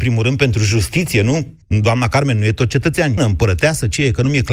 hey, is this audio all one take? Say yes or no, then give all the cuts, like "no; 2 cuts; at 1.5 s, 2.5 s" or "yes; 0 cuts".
no; 2 cuts; at 1.6 s, 3.2 s